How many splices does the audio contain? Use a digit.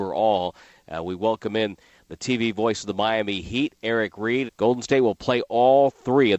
1